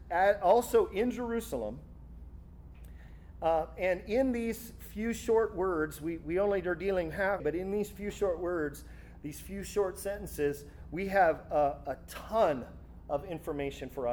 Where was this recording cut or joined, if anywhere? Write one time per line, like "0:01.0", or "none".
0:07.4